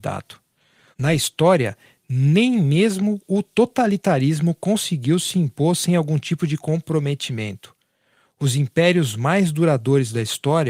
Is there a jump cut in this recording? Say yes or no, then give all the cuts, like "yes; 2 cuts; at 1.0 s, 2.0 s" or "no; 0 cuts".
yes; 1 cut; at 0.9 s